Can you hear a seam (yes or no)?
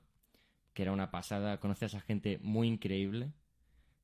no